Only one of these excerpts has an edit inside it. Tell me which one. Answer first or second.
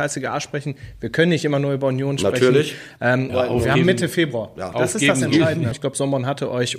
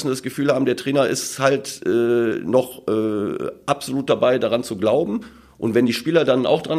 first